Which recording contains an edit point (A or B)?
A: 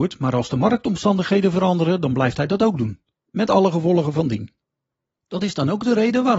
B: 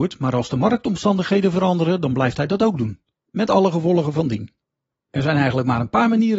B